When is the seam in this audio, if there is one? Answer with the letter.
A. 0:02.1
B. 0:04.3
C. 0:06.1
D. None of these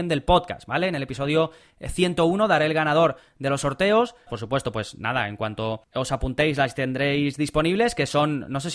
B